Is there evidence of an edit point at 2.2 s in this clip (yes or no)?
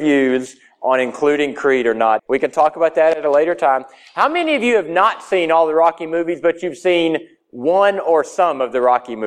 yes